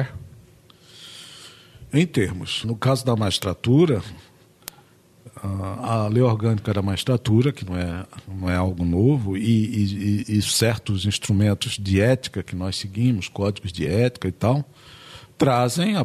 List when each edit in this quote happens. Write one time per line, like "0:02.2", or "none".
0:02.6